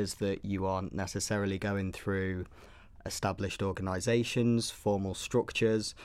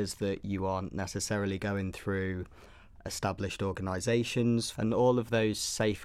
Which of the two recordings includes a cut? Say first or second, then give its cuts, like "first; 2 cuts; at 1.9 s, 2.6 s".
second; 1 cut; at 4.7 s